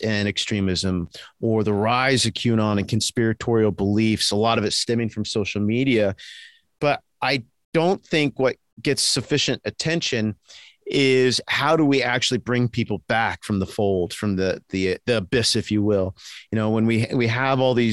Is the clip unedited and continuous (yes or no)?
yes